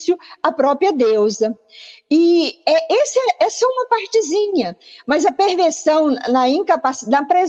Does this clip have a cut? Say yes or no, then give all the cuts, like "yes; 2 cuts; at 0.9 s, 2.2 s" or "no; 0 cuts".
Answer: no; 0 cuts